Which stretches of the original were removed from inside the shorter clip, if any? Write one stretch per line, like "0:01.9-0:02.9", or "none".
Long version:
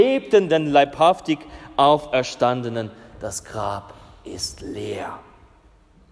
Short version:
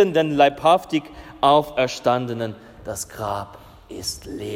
none